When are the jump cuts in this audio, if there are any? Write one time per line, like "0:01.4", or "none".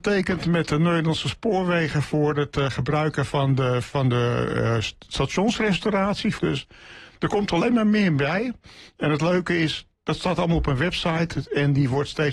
0:06.4